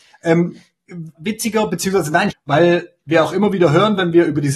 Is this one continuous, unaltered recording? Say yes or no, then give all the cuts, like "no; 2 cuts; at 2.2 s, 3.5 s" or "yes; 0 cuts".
no; 2 cuts; at 1.1 s, 2.3 s